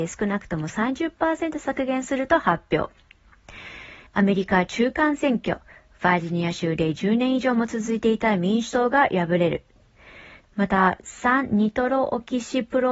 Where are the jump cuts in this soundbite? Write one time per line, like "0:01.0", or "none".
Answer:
0:04.1
0:10.4